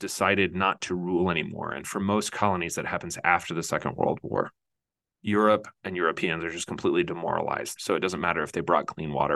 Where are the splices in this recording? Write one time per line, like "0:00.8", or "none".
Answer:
0:07.8